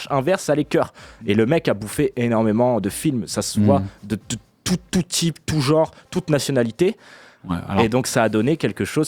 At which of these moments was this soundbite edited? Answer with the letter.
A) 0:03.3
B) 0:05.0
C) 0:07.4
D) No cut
C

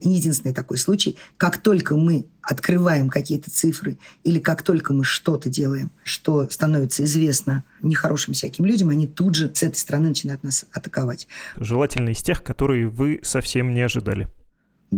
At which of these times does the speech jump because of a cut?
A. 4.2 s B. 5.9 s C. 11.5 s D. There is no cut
C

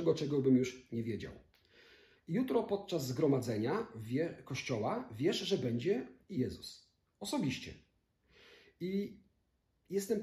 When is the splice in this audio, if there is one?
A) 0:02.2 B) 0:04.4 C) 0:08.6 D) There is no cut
A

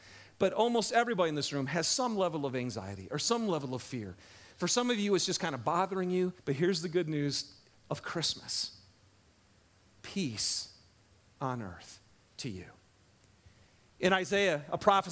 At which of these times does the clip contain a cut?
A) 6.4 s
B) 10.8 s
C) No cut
A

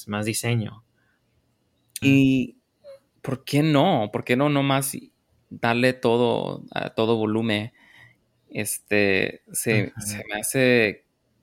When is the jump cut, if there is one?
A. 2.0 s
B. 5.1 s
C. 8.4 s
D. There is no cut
A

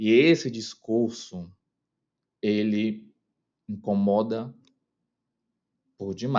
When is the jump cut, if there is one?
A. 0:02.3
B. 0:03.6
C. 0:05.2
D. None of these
A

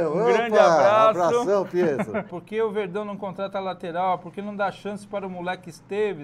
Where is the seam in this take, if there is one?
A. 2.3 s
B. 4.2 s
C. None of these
A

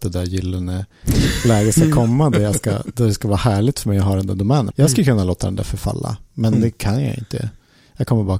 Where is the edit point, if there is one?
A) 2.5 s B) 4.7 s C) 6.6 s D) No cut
B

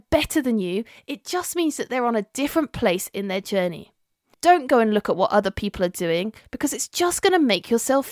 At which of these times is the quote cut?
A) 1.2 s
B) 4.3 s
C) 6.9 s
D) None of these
B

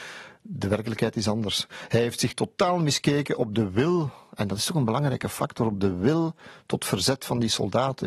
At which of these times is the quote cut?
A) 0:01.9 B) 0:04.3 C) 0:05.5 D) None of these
D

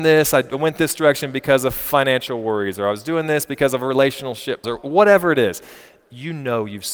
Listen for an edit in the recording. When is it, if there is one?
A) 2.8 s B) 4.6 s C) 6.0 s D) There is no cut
B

